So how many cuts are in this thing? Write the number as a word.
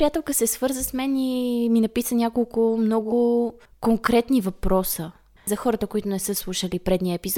one